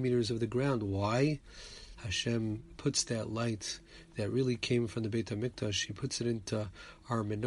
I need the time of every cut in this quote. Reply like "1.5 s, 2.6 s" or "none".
2.0 s